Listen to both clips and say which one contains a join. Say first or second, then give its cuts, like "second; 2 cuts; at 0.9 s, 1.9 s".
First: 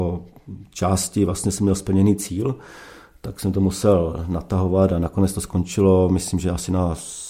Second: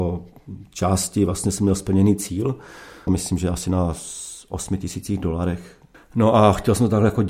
second; 2 cuts; at 3.1 s, 5.9 s